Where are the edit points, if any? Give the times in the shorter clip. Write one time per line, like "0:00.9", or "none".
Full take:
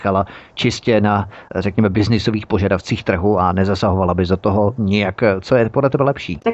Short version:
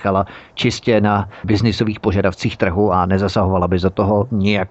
0:01.4